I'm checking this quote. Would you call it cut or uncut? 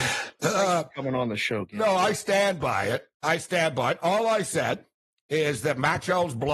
cut